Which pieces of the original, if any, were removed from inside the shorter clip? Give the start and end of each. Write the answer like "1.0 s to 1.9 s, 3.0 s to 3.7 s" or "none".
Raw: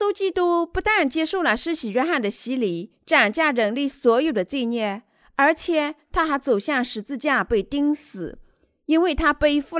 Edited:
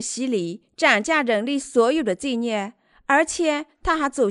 none